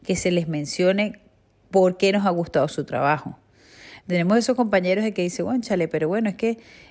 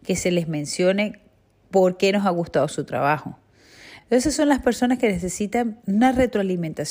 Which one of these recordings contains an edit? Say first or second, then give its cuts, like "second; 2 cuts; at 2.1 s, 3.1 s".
first; 1 cut; at 4.0 s